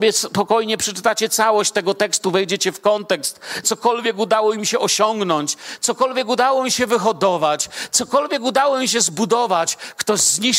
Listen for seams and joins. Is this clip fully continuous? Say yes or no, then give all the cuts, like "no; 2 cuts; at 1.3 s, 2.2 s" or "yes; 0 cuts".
no; 1 cut; at 3.6 s